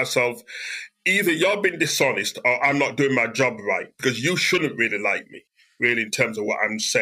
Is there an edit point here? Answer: no; 0 cuts

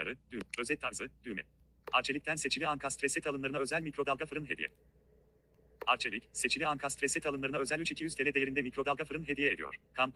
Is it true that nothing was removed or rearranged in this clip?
yes; 0 cuts

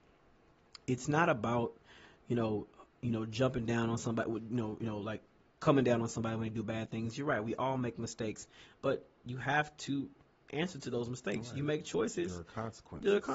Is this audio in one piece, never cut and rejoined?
yes; 0 cuts

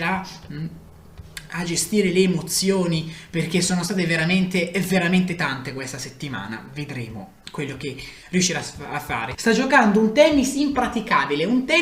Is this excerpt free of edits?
no; 1 cut; at 9.3 s

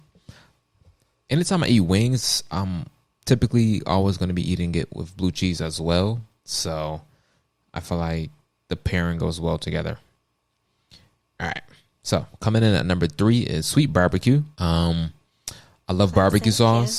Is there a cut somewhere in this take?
yes; 1 cut; at 14.5 s

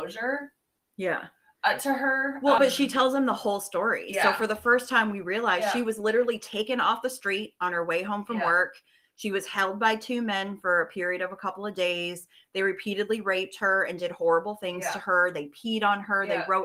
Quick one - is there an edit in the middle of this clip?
yes; 1 cut; at 2.6 s

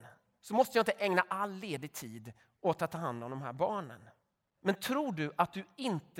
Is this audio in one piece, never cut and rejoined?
no; 1 cut; at 4.6 s

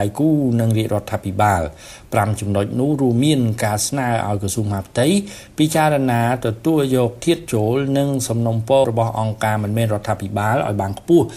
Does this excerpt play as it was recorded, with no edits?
no; 1 cut; at 8.8 s

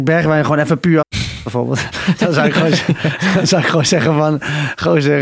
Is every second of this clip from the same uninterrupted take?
no; 1 cut; at 1.0 s

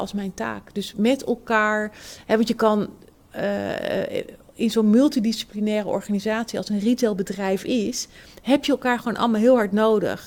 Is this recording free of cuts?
yes; 0 cuts

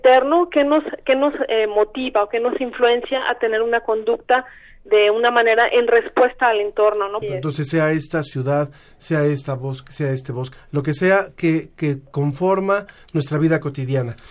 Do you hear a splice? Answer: yes; 2 cuts; at 7.2 s, 10.5 s

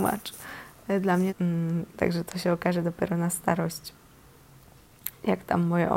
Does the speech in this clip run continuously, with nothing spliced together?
no; 1 cut; at 1.3 s

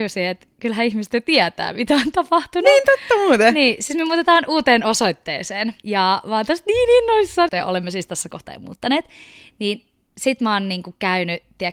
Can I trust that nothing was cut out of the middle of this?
no; 1 cut; at 7.5 s

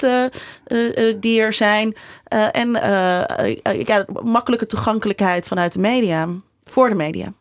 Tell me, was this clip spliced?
no; 0 cuts

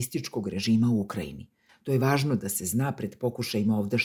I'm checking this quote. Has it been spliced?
yes; 1 cut; at 1.7 s

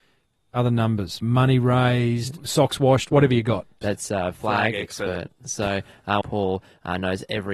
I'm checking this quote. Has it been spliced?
yes; 3 cuts; at 1.2 s, 3.8 s, 6.2 s

